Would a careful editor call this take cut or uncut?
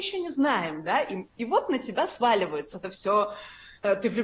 cut